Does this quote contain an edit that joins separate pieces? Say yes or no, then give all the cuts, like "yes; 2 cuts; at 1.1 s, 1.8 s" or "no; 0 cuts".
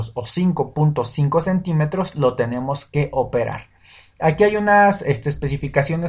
no; 0 cuts